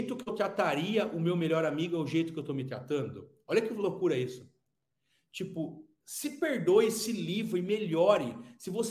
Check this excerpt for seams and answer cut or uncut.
uncut